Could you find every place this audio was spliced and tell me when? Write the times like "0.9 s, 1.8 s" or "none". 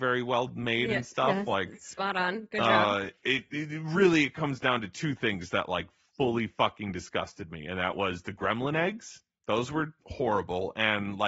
none